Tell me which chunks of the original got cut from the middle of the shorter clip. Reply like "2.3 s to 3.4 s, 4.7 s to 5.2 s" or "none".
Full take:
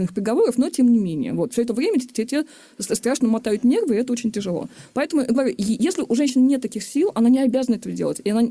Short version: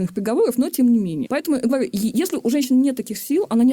1.2 s to 4.9 s